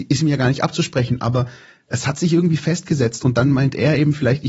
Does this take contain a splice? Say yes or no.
no